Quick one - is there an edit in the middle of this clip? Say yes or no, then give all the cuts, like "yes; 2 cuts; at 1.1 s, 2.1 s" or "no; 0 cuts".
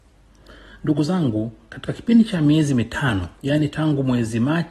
yes; 1 cut; at 3.3 s